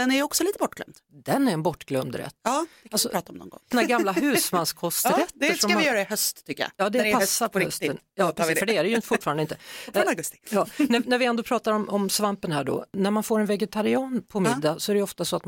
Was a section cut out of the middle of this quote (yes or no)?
yes